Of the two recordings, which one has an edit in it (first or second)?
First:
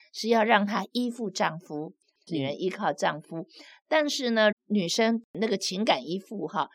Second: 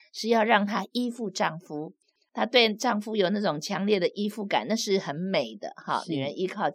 first